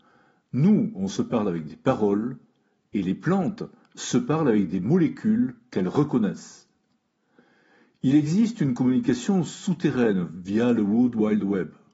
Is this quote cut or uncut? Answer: uncut